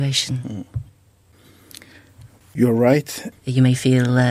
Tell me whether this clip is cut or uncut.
cut